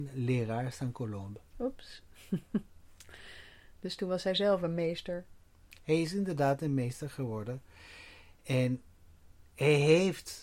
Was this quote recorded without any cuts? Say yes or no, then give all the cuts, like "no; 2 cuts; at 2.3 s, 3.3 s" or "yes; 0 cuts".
yes; 0 cuts